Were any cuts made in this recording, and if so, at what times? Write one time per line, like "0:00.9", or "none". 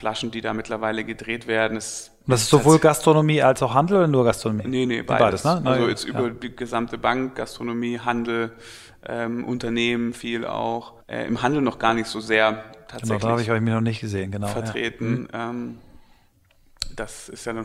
0:11.0